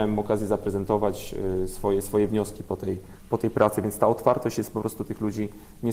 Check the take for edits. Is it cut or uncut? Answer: uncut